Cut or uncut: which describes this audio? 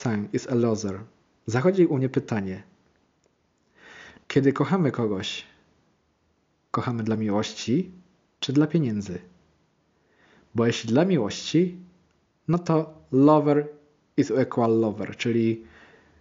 cut